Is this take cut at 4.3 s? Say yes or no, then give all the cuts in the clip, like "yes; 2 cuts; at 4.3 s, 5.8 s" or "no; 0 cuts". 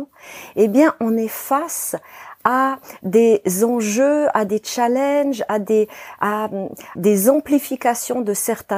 no; 1 cut; at 7.0 s